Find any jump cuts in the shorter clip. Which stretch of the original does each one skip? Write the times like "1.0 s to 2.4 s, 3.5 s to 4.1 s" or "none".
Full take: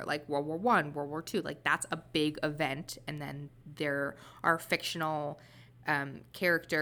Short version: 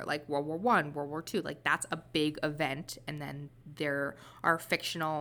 none